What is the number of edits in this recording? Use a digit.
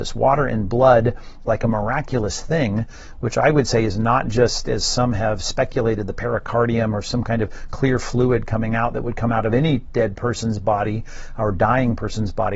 1